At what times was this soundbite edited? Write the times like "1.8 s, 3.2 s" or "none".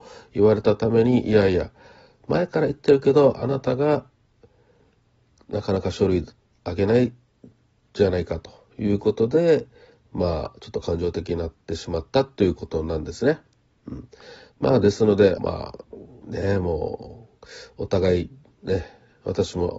15.4 s